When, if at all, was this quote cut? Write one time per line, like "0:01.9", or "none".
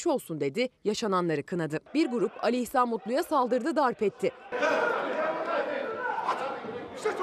0:01.9
0:04.5